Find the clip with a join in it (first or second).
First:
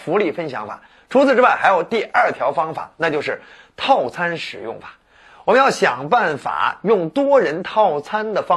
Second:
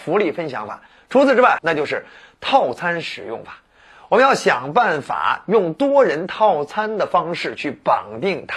second